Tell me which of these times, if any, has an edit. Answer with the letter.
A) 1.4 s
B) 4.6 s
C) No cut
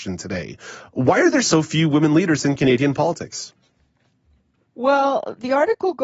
A